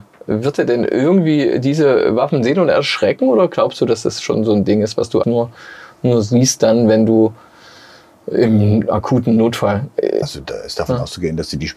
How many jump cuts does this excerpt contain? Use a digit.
2